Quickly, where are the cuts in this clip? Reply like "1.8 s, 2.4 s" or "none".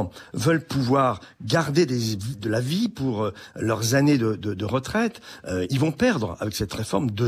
none